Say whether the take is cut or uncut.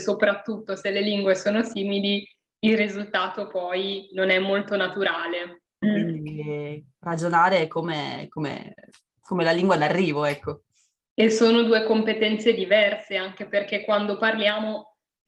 cut